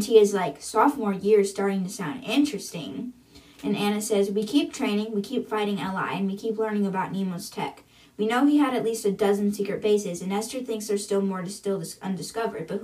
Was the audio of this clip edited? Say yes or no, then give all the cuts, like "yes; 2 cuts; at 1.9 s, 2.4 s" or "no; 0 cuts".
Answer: no; 0 cuts